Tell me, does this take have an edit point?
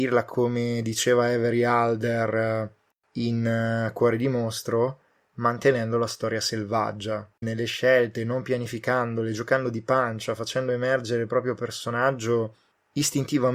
yes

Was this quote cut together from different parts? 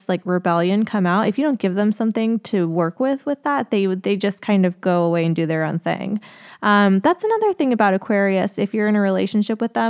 no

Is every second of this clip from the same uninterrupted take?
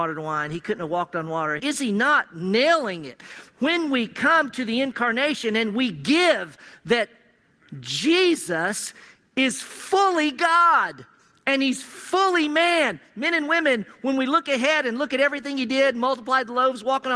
no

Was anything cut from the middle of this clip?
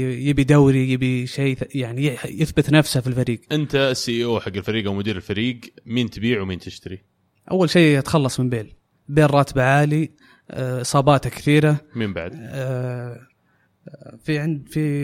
no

